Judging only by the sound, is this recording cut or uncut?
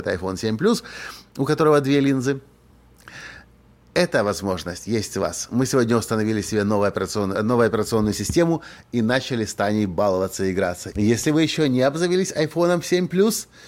cut